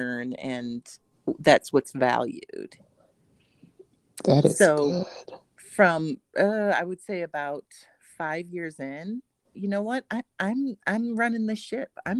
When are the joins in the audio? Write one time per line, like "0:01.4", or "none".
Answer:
0:09.5